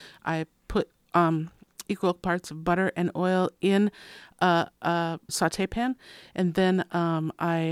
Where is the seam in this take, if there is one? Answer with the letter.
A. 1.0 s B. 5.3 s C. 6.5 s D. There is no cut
B